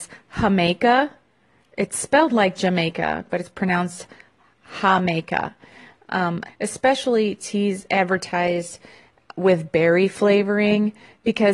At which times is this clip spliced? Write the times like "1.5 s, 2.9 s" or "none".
6.5 s